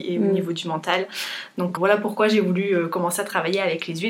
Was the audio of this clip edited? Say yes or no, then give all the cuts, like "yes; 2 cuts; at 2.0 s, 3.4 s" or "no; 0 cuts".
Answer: yes; 1 cut; at 1.8 s